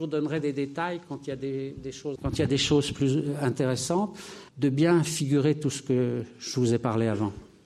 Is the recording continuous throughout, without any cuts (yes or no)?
no